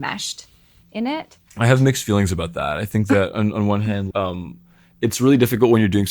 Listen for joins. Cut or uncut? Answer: cut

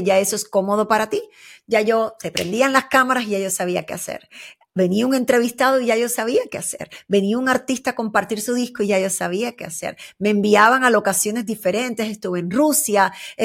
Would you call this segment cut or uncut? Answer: uncut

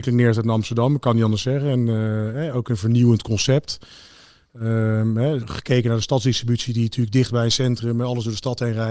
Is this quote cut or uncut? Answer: cut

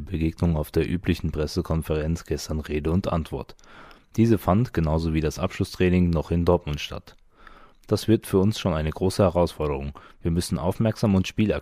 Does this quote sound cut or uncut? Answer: uncut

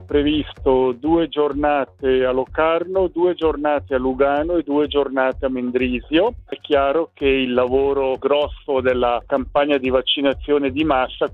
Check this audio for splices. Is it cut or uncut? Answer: cut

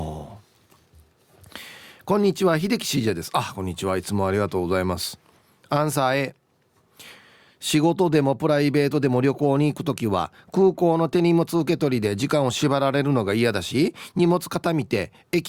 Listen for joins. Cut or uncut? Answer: uncut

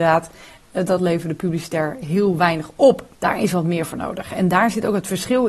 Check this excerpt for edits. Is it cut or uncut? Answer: cut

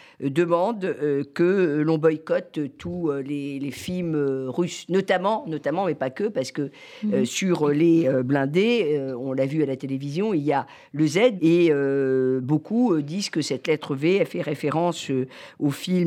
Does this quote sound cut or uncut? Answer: cut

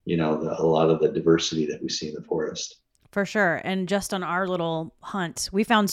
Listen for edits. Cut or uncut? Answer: uncut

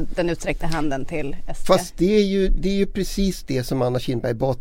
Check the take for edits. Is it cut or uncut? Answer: uncut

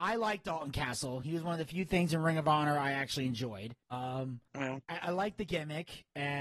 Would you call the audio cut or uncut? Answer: uncut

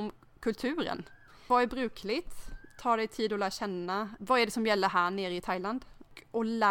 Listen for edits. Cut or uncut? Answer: uncut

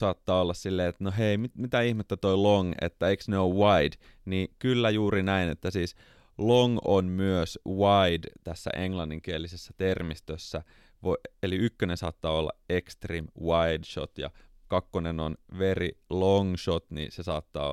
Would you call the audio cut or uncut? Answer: uncut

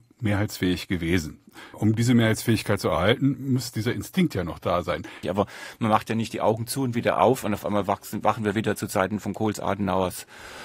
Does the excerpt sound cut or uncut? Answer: cut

